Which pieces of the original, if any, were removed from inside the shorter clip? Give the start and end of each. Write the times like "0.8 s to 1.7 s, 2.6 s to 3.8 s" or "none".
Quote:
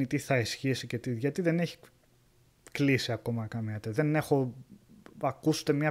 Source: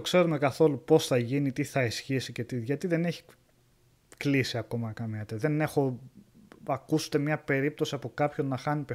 none